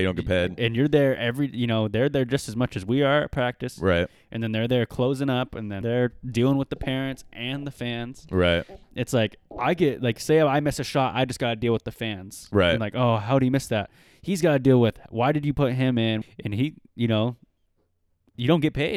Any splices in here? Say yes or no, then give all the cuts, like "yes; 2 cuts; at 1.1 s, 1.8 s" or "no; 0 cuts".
yes; 2 cuts; at 5.8 s, 16.2 s